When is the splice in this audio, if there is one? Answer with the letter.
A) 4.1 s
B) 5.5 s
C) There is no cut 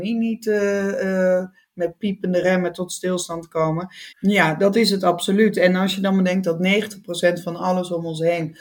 A